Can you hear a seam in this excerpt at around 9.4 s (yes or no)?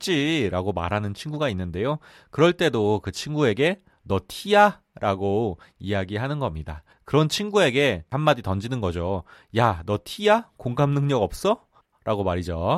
no